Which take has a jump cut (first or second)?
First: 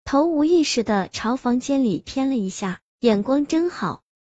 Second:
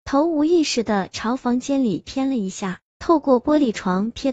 second